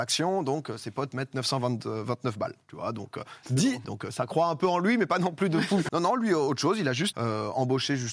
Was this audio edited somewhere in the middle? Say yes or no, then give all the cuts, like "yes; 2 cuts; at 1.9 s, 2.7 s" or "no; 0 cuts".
yes; 3 cuts; at 3.8 s, 5.9 s, 7.1 s